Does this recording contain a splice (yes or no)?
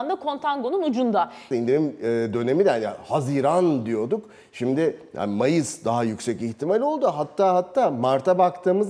yes